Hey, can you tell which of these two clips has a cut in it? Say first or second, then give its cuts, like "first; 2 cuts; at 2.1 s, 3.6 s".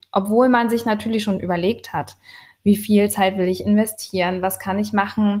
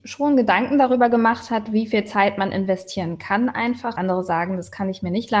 second; 1 cut; at 4.0 s